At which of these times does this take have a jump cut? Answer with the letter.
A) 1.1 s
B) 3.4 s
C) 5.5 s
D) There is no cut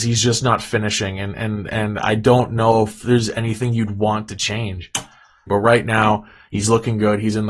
C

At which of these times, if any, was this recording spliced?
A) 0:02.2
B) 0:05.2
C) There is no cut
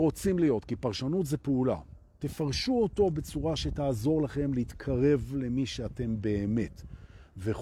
A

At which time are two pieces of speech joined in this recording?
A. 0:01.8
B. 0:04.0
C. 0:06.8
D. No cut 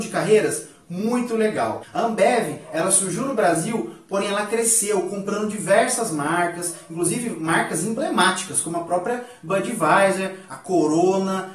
A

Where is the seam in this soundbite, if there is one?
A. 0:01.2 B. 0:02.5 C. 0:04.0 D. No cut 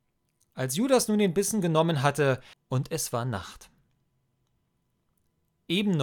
B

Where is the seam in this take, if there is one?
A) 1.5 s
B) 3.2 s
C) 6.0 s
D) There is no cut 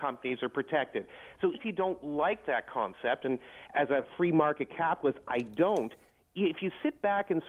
A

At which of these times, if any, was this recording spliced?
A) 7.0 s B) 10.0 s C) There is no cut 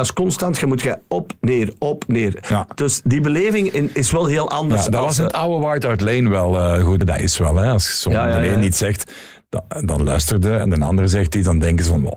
A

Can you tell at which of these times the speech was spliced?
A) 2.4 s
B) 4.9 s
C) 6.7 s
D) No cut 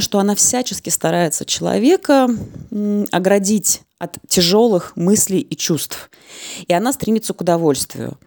D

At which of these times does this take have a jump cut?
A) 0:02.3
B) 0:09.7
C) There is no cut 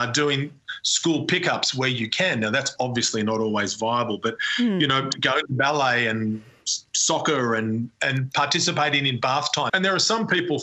B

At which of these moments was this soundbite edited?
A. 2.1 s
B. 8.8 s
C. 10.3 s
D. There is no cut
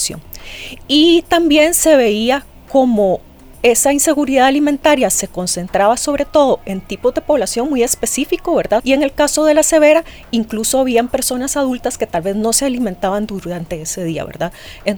B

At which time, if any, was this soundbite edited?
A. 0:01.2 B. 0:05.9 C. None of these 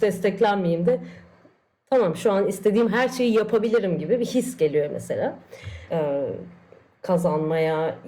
B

